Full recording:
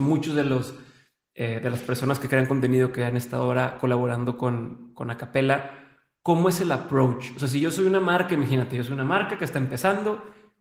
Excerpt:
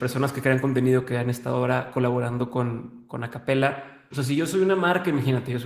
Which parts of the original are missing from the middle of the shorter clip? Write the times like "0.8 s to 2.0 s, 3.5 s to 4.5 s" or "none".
6.0 s to 7.3 s